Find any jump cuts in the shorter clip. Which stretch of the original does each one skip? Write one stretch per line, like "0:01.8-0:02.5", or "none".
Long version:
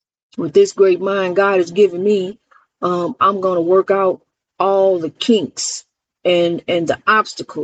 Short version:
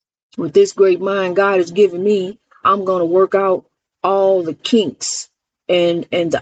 0:02.6-0:03.2